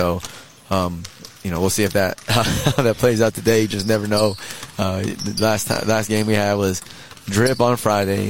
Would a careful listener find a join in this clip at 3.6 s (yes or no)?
no